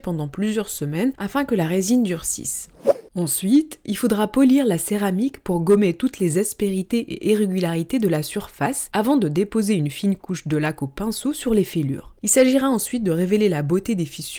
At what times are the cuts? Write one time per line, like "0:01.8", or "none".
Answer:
0:12.2

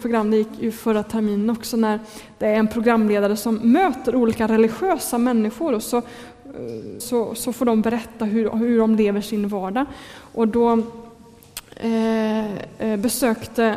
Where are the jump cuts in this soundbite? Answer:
0:07.0

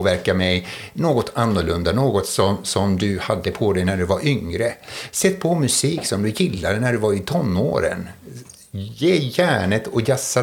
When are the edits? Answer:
none

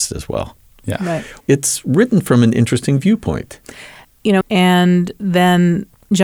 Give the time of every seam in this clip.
0:01.4
0:04.4

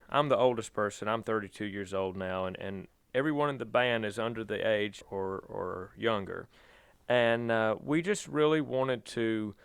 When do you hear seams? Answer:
0:05.0

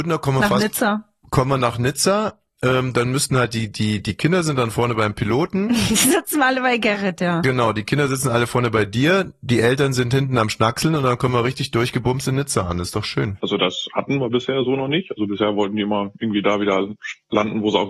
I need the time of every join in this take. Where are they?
0:13.4

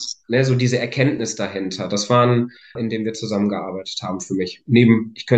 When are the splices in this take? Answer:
0:02.8

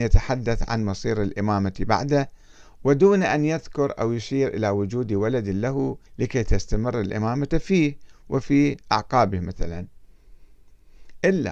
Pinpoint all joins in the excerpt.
0:06.1

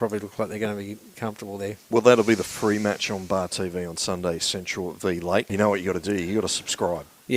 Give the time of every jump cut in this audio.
0:01.1
0:05.5

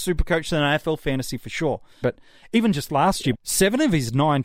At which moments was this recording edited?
0:02.0
0:03.3

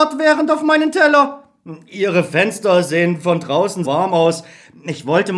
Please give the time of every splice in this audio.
0:03.8

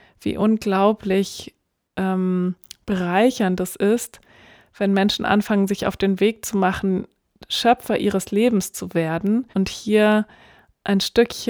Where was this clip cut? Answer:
0:09.5

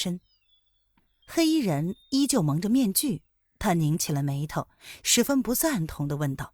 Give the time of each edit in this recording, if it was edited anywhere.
0:01.2

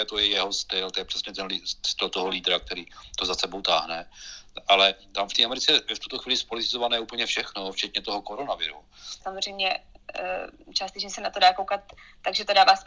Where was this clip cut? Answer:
0:09.2

